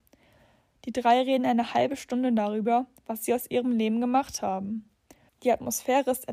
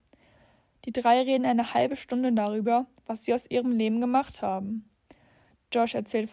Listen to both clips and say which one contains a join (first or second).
first